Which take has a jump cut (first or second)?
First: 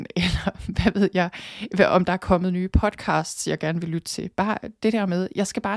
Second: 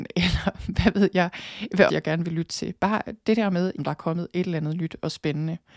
second